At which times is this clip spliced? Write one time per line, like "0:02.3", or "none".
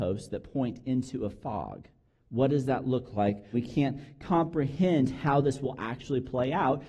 0:03.5

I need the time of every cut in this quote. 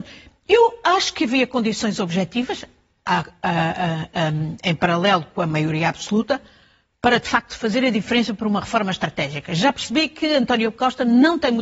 none

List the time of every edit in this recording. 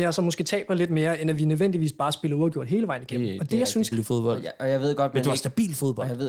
0:03.9

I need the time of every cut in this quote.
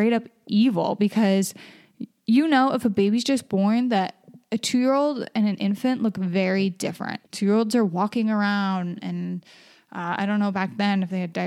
0:07.2

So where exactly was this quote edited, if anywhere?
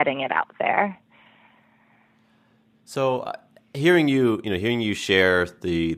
none

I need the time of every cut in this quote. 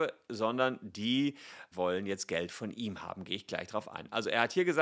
0:01.7

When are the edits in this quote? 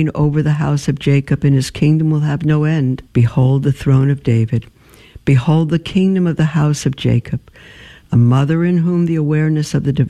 0:03.1
0:08.0

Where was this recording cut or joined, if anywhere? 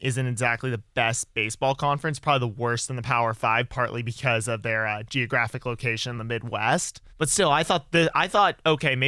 0:07.1

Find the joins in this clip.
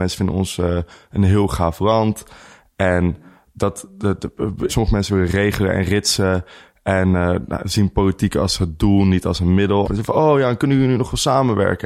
0:04.7
0:09.8

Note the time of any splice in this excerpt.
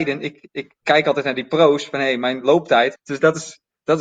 0:03.0

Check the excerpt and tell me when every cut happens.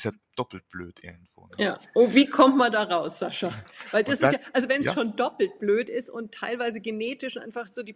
none

